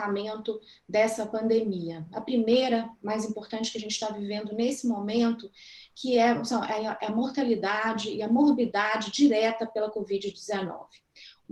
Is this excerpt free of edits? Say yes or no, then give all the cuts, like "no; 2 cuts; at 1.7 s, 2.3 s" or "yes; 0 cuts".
yes; 0 cuts